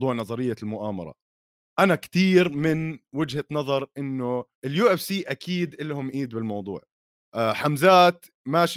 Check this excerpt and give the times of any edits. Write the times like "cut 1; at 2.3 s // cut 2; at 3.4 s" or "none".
cut 1; at 4.5 s